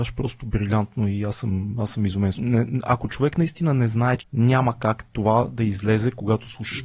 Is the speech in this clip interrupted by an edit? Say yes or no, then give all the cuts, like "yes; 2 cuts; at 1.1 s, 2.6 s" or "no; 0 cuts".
yes; 2 cuts; at 2.3 s, 4.2 s